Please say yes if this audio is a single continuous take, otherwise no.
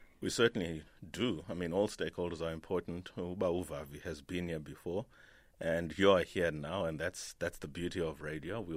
yes